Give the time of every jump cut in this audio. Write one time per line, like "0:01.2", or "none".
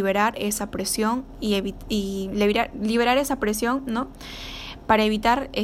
none